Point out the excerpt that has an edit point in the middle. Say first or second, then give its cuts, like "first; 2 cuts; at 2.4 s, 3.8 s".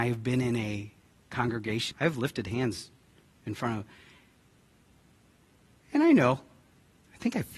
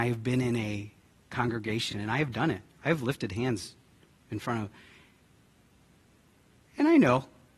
first; 1 cut; at 1.9 s